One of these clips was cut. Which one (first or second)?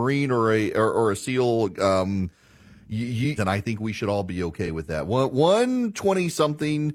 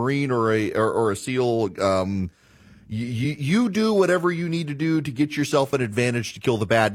first